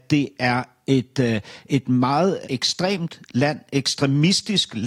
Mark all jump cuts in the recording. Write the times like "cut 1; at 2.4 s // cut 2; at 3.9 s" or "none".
none